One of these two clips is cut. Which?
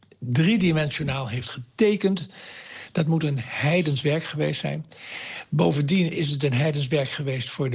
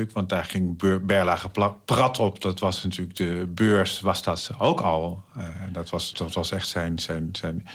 second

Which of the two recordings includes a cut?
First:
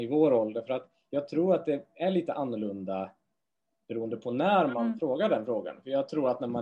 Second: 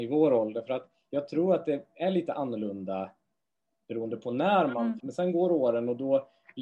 second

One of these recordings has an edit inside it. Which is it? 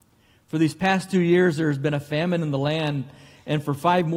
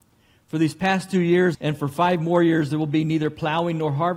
second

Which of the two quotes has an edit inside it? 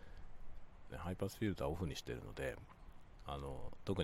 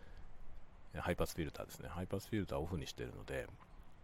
first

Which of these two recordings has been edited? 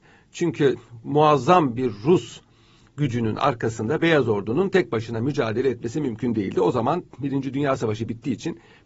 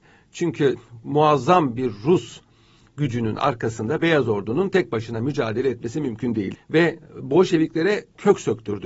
second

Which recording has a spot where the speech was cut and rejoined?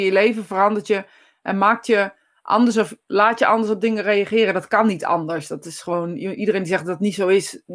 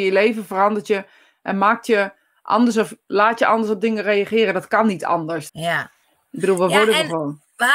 second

